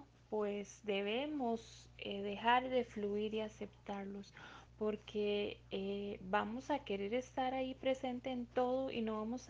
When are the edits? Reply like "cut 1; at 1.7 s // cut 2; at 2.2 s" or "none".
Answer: cut 1; at 4.7 s